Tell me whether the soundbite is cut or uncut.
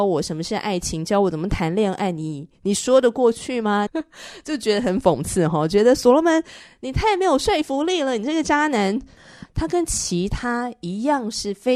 cut